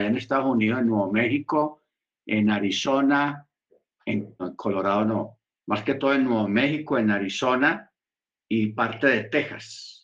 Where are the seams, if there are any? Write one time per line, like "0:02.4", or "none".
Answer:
0:04.4